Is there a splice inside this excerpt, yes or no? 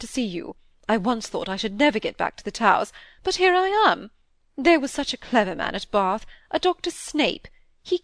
no